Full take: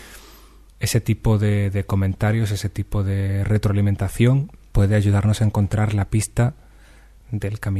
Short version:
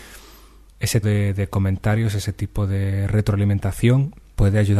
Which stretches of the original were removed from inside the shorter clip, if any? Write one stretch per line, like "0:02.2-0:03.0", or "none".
0:01.0-0:01.4